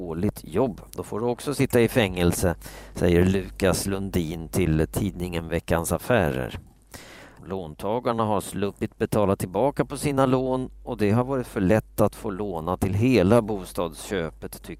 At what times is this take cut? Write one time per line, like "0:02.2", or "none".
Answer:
0:00.9
0:07.4